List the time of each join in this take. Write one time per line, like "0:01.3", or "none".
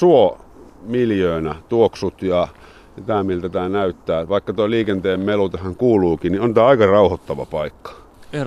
none